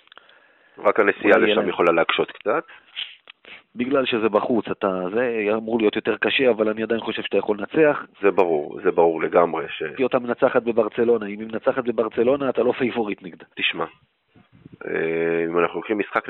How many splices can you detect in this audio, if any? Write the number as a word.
three